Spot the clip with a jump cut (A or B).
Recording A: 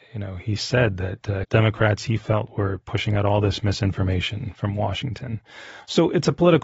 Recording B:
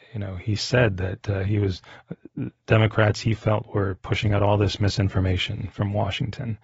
A